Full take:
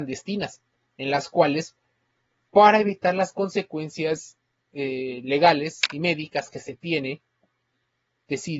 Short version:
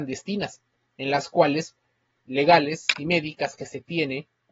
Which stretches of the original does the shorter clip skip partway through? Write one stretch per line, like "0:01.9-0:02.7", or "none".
0:02.3-0:05.2